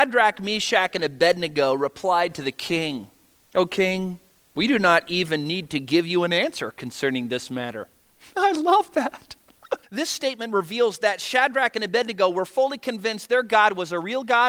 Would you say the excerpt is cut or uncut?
cut